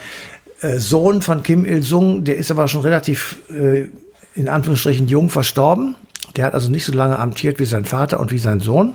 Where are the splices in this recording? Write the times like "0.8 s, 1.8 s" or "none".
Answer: none

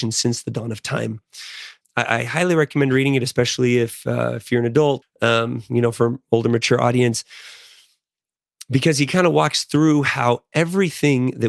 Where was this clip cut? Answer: 1.8 s, 5.0 s

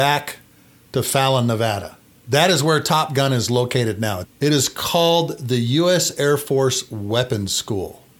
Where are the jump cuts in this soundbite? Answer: 4.2 s

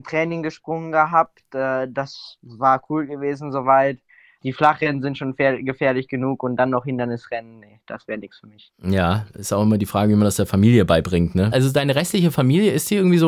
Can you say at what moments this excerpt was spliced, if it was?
4.4 s, 11.5 s

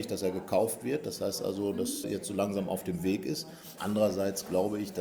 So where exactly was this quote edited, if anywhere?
2.0 s, 3.8 s

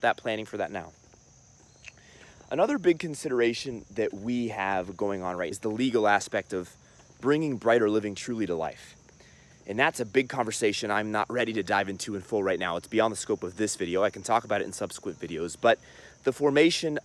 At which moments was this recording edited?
5.5 s

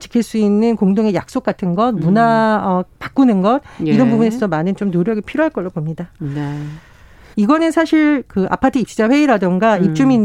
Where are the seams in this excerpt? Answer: 7.3 s

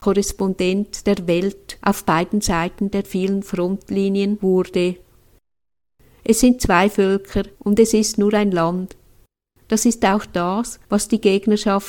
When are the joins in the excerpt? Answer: 7.5 s

